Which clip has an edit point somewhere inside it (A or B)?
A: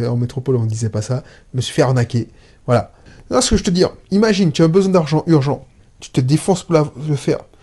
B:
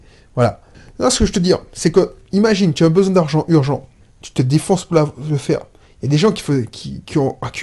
A